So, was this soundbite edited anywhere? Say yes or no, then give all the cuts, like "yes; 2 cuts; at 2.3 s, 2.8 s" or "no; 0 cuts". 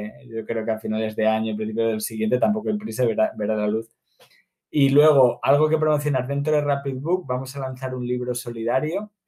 no; 0 cuts